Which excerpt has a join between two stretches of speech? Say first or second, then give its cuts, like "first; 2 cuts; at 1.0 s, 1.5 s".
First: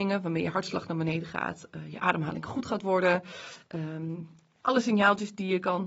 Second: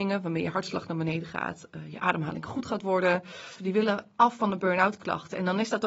second; 1 cut; at 3.6 s